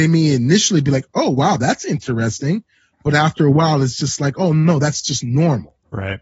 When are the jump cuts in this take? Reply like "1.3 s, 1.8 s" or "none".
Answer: none